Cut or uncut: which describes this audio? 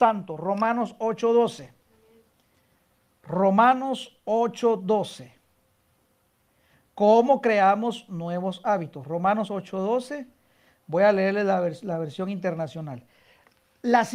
uncut